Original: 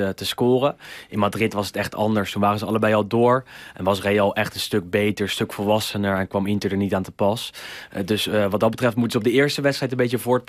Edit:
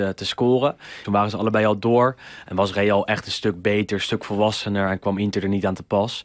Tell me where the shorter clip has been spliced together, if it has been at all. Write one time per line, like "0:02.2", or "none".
0:01.0